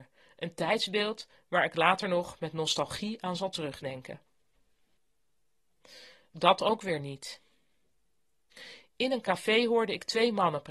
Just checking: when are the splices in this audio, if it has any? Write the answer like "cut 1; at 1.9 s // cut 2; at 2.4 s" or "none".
none